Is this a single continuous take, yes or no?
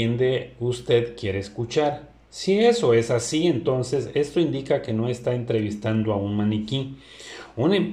yes